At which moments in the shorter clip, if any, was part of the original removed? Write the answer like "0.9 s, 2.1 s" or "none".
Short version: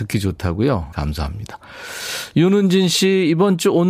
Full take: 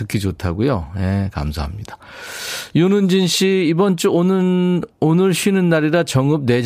0.9 s